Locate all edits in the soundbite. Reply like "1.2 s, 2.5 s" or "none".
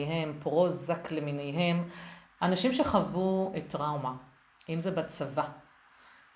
2.4 s